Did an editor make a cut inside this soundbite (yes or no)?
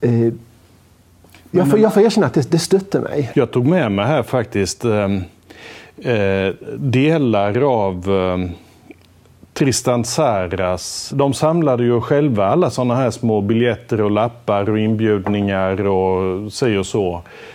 yes